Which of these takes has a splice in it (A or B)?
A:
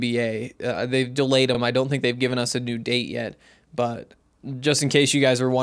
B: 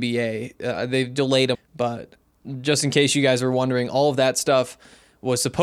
B